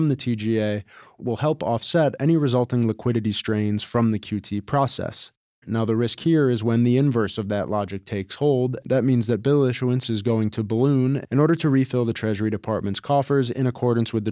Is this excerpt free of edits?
no; 1 cut; at 8.8 s

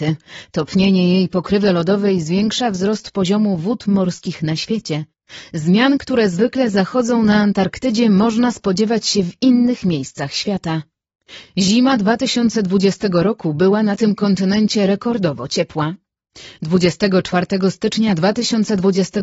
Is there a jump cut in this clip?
no; 0 cuts

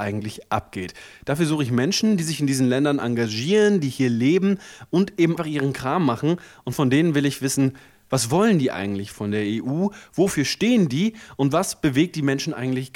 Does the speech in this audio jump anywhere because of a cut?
yes; 1 cut; at 5.4 s

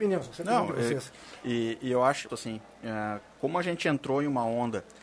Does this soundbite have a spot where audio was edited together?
yes; 1 cut; at 2.3 s

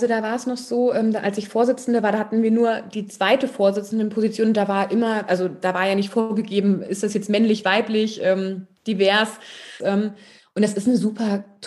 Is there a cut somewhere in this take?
yes; 1 cut; at 9.8 s

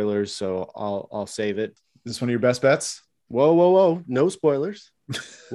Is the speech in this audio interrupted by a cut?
yes; 1 cut; at 1.8 s

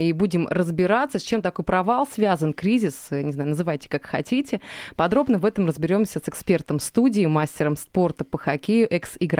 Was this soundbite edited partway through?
no; 0 cuts

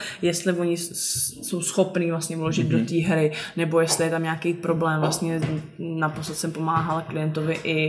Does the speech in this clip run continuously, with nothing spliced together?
yes; 0 cuts

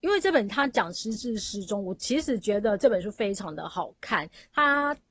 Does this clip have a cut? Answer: no; 0 cuts

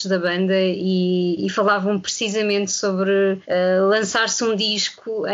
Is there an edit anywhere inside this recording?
yes; 1 cut; at 3.4 s

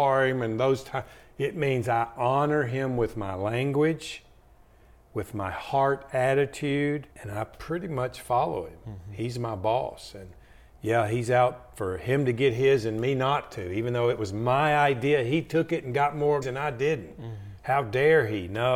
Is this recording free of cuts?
no; 2 cuts; at 7.1 s, 16.4 s

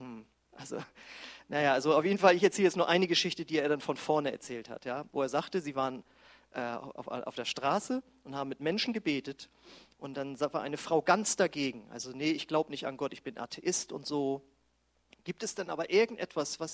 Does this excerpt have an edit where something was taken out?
no; 0 cuts

